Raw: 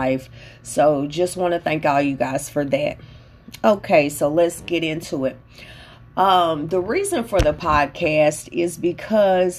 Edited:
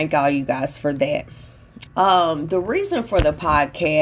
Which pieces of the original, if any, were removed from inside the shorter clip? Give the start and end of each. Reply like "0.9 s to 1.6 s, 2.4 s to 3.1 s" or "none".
3.6 s to 6.1 s